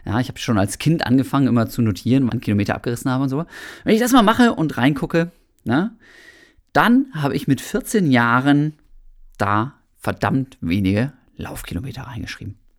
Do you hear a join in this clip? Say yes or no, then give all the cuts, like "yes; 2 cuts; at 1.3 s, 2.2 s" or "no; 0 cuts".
yes; 1 cut; at 2.3 s